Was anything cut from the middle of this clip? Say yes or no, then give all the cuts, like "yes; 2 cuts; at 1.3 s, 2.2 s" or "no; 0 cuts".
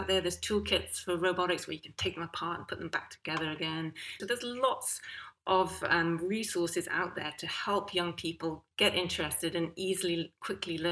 yes; 2 cuts; at 4.2 s, 8.7 s